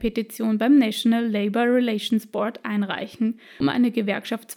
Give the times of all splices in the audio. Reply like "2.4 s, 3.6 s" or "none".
3.6 s